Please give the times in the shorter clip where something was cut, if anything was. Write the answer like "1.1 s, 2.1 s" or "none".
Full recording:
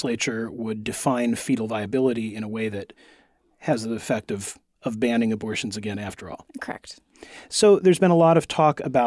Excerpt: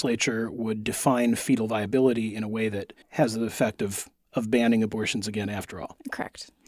3.0 s